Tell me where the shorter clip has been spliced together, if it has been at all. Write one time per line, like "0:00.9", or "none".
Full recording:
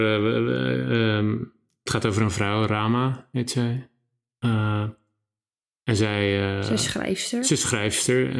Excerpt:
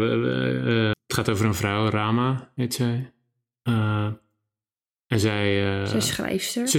0:00.9